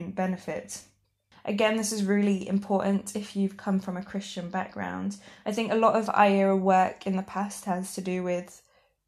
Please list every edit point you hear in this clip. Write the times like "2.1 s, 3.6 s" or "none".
1.3 s